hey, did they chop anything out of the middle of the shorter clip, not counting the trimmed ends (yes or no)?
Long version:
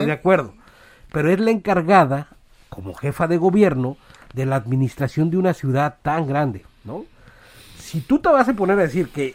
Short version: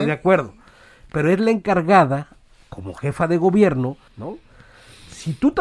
yes